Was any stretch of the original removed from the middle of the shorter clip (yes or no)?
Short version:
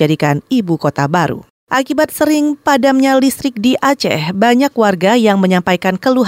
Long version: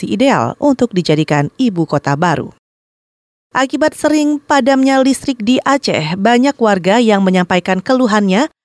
yes